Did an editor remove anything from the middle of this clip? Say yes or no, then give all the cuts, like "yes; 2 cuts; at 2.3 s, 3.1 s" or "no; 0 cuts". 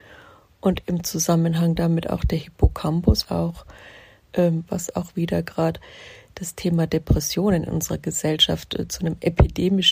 yes; 2 cuts; at 3.2 s, 4.7 s